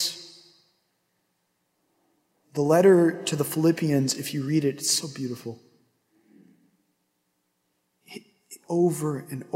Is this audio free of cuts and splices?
yes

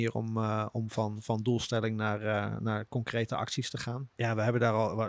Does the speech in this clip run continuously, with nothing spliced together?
no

